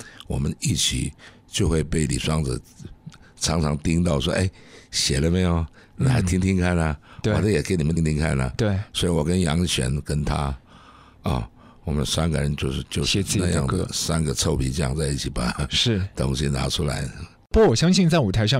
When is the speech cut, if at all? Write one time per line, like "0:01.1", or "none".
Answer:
0:08.0